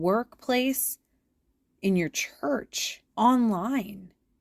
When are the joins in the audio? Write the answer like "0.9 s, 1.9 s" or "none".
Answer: 3.1 s